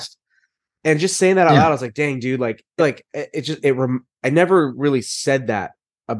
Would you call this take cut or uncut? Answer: cut